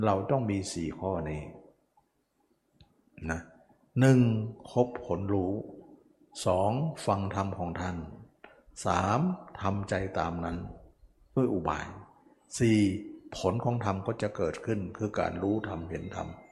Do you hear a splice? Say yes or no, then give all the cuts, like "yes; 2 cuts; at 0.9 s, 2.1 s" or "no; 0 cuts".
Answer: no; 0 cuts